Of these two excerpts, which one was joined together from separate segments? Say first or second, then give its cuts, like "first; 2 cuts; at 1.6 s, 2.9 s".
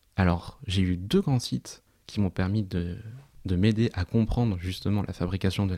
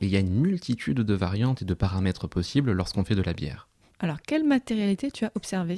second; 1 cut; at 3.9 s